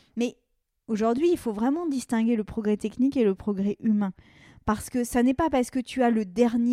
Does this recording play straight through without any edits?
yes; 0 cuts

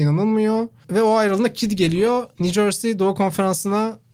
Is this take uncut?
yes; 0 cuts

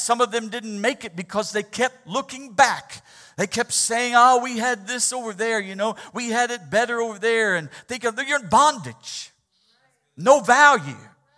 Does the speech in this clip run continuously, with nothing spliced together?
yes; 0 cuts

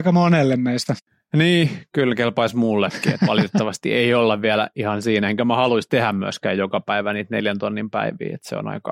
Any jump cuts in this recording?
no; 0 cuts

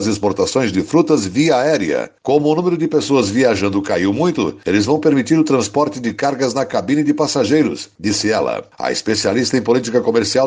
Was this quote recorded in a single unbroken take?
yes; 0 cuts

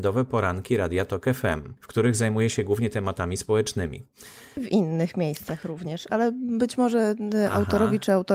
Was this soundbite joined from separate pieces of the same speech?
yes; 2 cuts; at 1.8 s, 4.6 s

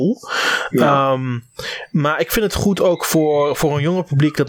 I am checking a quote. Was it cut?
no; 0 cuts

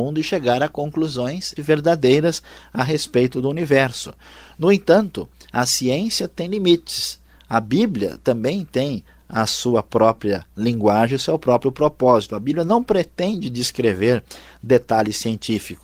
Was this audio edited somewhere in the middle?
yes; 1 cut; at 1.6 s

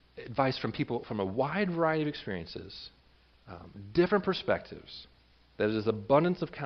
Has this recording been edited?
no; 0 cuts

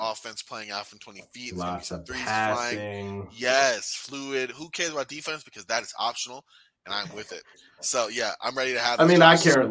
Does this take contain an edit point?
no; 0 cuts

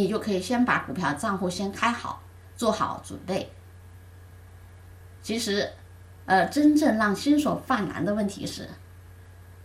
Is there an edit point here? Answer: no; 0 cuts

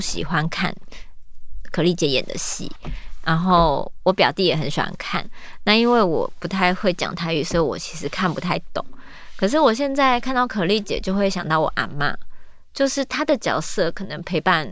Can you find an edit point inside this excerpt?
no; 0 cuts

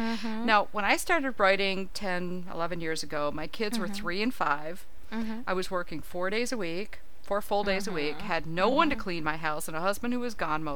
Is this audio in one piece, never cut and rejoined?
yes; 0 cuts

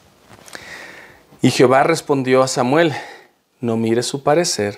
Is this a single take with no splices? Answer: yes; 0 cuts

